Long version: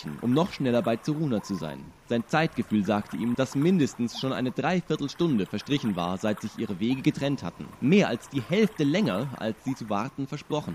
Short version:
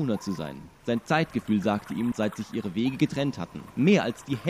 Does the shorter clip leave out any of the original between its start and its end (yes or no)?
yes